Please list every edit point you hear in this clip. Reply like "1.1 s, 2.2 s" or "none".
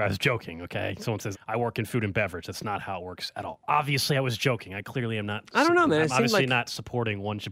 1.3 s